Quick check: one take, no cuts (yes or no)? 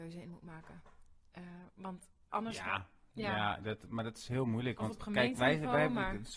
yes